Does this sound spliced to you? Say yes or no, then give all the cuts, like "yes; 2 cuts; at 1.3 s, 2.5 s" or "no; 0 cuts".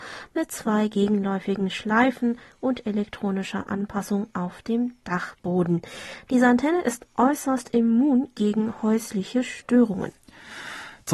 no; 0 cuts